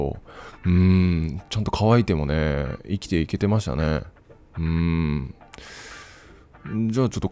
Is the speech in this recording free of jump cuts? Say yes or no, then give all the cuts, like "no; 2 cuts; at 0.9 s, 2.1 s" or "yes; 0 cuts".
yes; 0 cuts